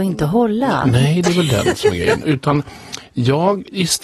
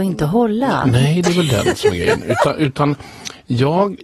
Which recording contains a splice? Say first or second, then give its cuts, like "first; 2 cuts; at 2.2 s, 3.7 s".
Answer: first; 1 cut; at 2.2 s